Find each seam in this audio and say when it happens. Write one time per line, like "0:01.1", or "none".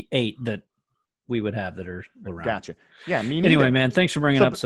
0:02.2